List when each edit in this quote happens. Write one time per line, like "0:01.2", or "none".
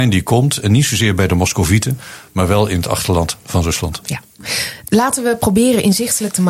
none